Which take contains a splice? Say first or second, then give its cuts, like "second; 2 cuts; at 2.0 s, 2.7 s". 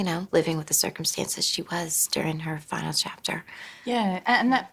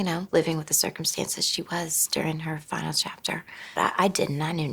second; 1 cut; at 3.8 s